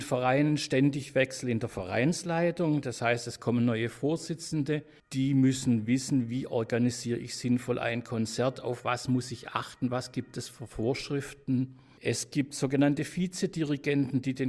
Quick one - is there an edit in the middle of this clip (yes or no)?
no